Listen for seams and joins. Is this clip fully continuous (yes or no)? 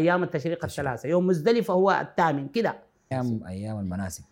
no